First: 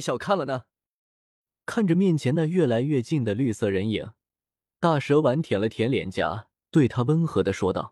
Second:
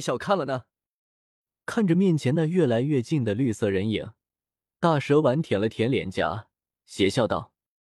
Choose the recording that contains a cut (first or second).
first